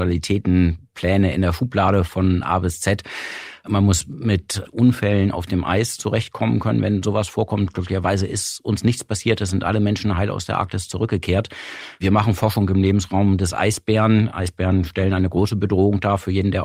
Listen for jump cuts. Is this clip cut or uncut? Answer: uncut